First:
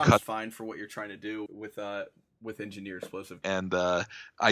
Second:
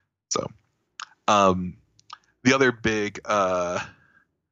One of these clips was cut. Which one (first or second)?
first